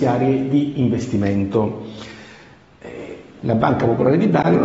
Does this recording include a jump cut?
yes; 1 cut; at 3.4 s

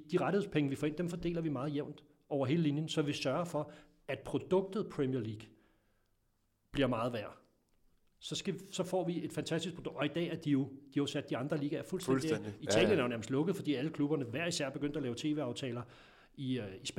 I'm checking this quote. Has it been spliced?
no; 0 cuts

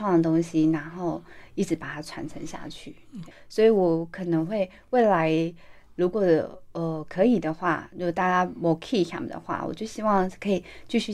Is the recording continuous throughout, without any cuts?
no; 1 cut; at 3.3 s

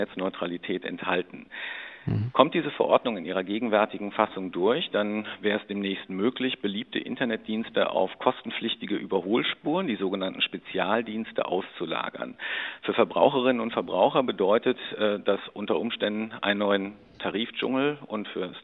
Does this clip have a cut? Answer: no; 0 cuts

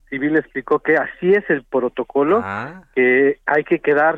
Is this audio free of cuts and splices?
yes; 0 cuts

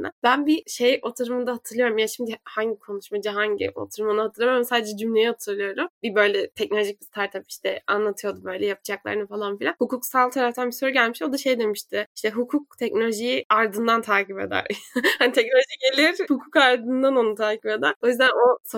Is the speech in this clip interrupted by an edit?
yes; 1 cut; at 16.3 s

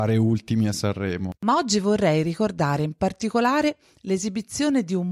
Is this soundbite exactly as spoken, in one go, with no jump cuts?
no; 1 cut; at 1.4 s

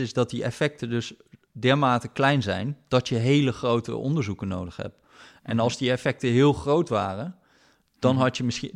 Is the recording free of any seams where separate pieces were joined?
yes; 0 cuts

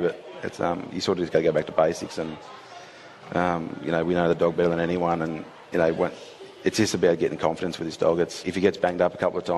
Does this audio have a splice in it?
yes; 2 cuts; at 5.7 s, 8.4 s

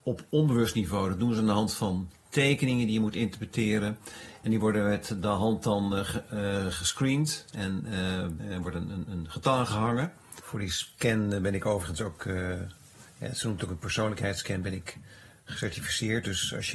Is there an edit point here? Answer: no; 0 cuts

